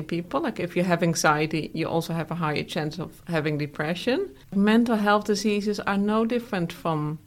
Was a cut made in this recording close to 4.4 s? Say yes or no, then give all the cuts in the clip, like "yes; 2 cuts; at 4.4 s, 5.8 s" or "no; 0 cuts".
yes; 1 cut; at 4.4 s